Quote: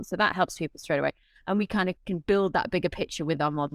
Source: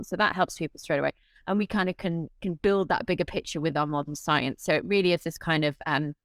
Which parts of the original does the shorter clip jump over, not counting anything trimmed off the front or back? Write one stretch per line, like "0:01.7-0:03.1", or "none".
0:02.0-0:02.3